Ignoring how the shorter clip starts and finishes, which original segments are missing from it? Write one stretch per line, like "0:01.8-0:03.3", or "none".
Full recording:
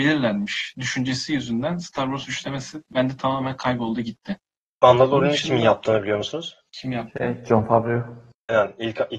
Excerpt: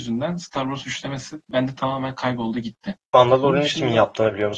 0:04.4-0:04.7

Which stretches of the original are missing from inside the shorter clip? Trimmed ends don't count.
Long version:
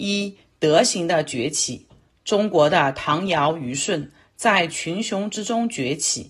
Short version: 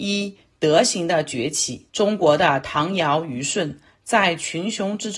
0:01.9-0:02.2

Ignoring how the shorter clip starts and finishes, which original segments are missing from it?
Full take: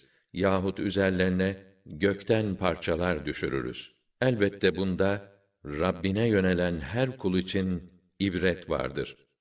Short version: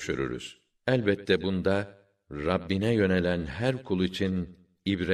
none

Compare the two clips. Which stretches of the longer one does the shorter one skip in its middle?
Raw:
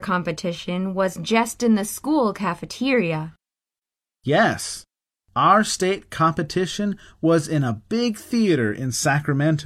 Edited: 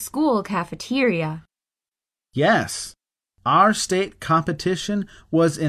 none

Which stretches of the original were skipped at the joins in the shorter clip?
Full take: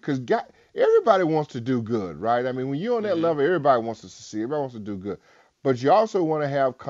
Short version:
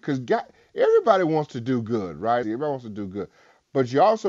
0:02.4-0:04.3

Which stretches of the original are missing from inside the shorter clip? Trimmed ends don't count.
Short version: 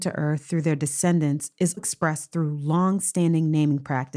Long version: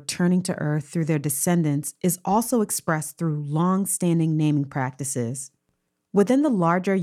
0:02.2-0:02.6

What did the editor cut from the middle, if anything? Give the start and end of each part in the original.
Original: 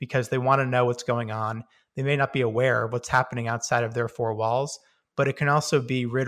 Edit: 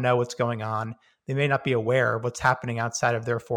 none

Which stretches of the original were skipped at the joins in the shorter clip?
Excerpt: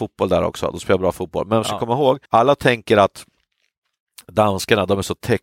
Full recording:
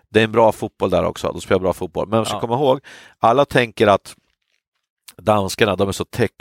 0:02.9-0:03.1

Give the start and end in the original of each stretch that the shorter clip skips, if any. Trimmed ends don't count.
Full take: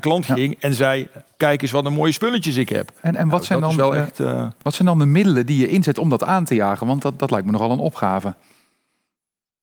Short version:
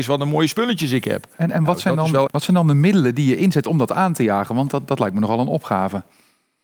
0:03.9-0:04.6

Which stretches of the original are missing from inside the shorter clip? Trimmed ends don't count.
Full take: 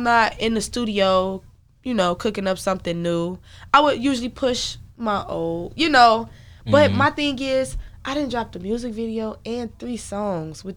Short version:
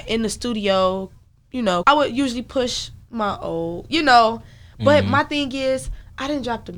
0:02.1-0:03.7

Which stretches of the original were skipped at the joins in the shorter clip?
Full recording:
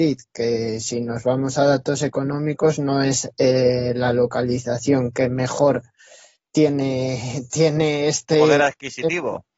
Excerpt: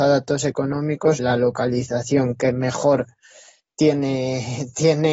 0:02.8-0:03.9

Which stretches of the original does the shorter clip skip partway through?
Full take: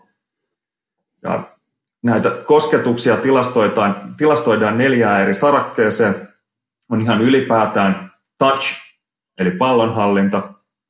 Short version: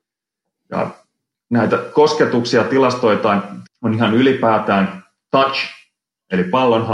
0:04.2-0:06.7

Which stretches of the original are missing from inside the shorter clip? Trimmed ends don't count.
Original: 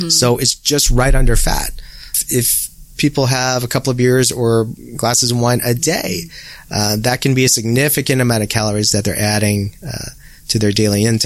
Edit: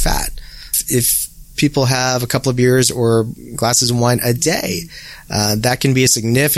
none

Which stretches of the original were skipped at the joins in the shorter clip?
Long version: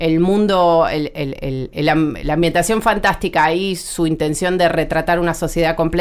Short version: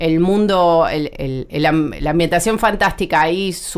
0:01.1-0:01.4

